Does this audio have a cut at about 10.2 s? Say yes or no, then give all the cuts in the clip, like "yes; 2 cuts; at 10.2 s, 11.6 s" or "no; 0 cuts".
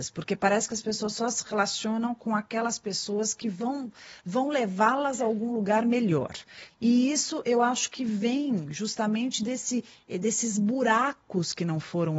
no; 1 cut; at 6.7 s